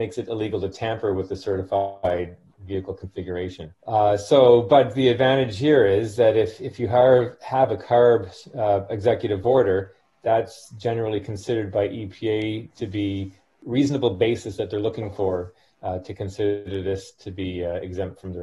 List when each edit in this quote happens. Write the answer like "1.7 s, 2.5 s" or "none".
3.8 s